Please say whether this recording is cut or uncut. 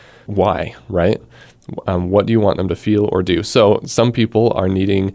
uncut